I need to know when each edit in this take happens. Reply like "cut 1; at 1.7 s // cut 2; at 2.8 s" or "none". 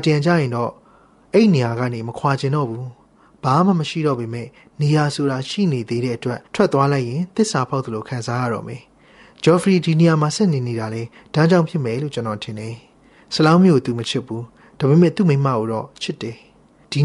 cut 1; at 6.5 s